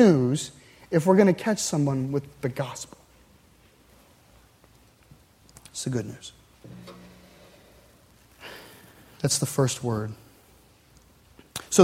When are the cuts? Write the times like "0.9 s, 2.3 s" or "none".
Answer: none